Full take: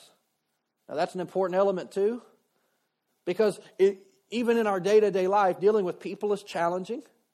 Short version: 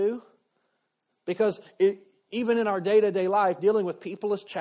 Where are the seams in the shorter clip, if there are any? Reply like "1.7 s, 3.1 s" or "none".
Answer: none